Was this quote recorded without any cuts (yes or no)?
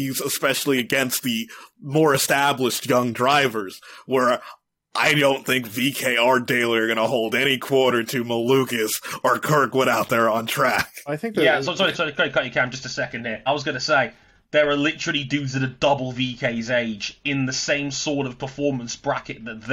no